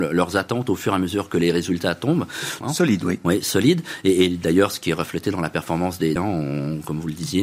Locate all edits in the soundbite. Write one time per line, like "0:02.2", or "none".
0:02.6
0:06.2